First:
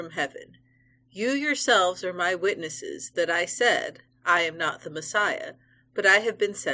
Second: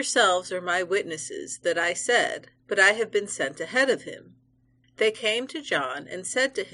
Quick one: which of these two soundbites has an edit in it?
second; 2 cuts; at 2.6 s, 4.8 s

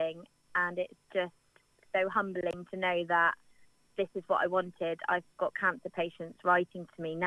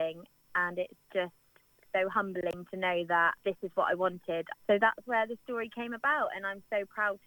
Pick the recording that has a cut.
second; 2 cuts; at 3.4 s, 4.5 s

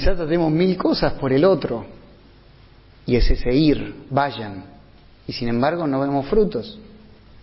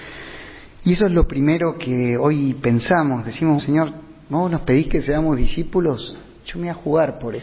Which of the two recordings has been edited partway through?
second; 1 cut; at 3.6 s

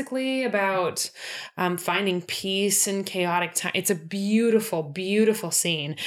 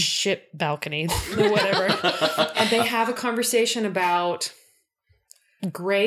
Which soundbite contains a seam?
second; 2 cuts; at 1.1 s, 2.5 s

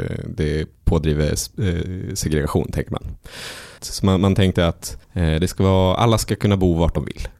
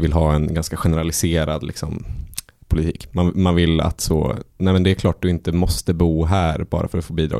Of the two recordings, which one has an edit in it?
first; 2 cuts; at 3.8 s, 5.0 s

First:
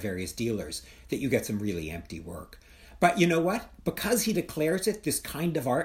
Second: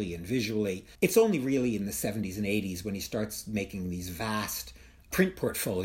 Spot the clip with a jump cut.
second; 1 cut; at 0.9 s

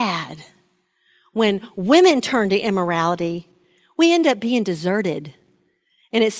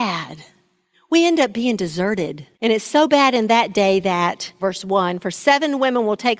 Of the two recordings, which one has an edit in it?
second; 3 cuts; at 0.9 s, 2.5 s, 4.6 s

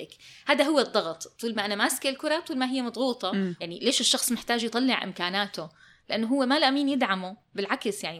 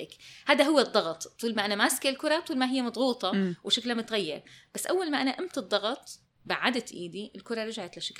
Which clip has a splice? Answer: first; 1 cut; at 3.6 s

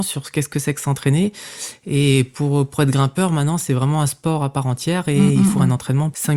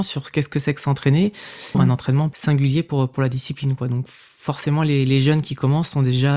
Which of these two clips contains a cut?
second; 1 cut; at 1.7 s

